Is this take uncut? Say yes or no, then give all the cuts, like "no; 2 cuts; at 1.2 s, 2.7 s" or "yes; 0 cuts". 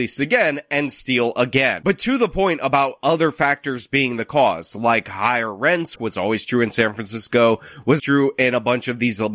no; 2 cuts; at 6.0 s, 8.0 s